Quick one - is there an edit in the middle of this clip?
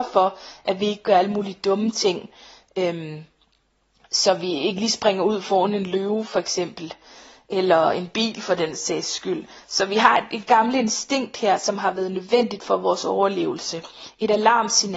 no; 0 cuts

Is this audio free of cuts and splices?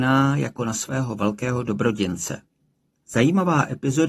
no; 1 cut; at 3.0 s

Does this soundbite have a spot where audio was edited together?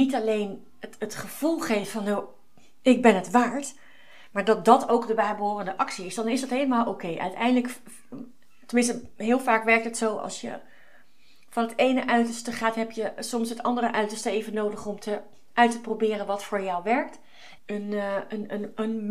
yes; 1 cut; at 17.6 s

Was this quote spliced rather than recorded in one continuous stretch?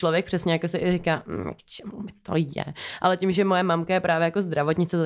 no; 0 cuts

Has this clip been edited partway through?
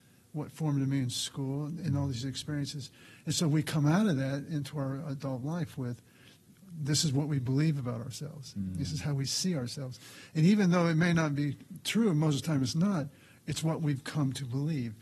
no; 0 cuts

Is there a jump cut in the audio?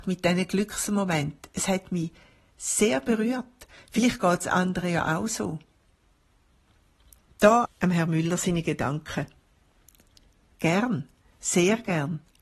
yes; 2 cuts; at 7.6 s, 10.5 s

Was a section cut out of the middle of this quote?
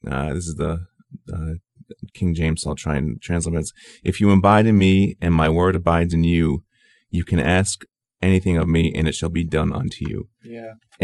no; 0 cuts

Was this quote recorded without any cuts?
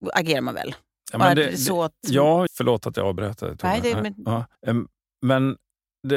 no; 2 cuts; at 2.5 s, 4.5 s

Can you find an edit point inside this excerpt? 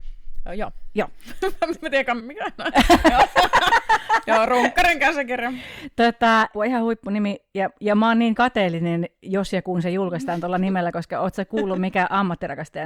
yes; 2 cuts; at 2.2 s, 6.5 s

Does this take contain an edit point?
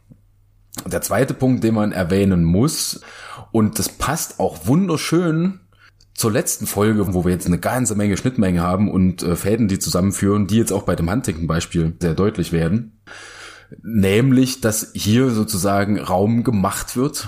yes; 2 cuts; at 7.1 s, 12.0 s

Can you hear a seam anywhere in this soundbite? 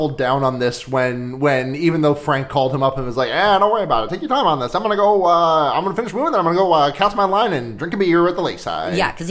no; 0 cuts

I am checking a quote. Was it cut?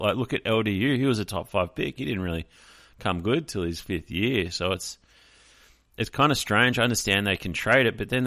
no; 0 cuts

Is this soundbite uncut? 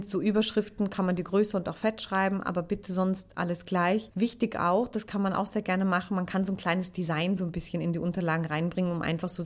yes; 0 cuts

